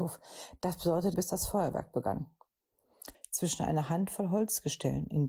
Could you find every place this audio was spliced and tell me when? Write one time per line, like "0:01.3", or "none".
0:01.1
0:03.1